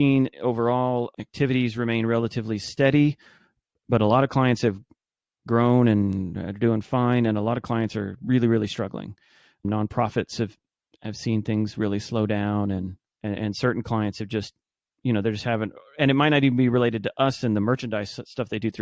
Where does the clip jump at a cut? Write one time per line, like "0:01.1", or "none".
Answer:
none